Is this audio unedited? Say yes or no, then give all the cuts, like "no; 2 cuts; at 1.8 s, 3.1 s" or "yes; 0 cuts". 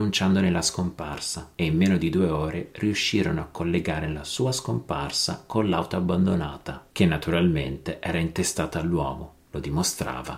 yes; 0 cuts